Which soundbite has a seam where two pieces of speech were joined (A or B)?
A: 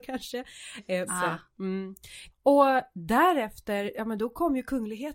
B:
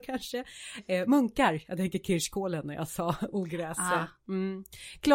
A